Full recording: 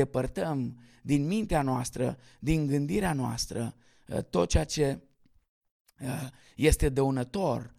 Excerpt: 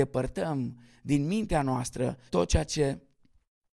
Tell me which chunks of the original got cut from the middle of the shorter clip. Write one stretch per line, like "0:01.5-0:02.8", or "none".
0:02.3-0:04.3